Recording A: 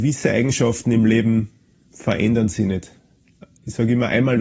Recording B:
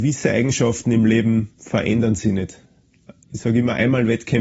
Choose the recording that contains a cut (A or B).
B